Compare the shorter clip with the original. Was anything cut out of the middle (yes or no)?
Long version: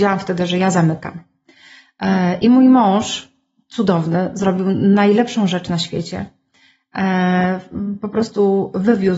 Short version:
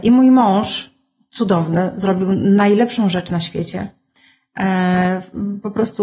no